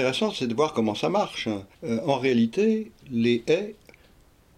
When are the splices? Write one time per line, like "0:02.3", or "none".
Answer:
0:01.7
0:03.0